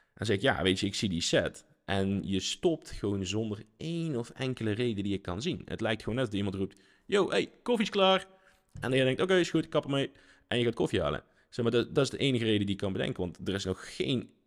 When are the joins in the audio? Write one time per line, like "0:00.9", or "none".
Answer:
none